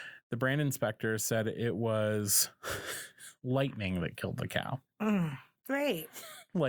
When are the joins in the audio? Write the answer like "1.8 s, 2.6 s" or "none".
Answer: 5.6 s